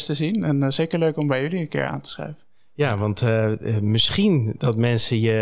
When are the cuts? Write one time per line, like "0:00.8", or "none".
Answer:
none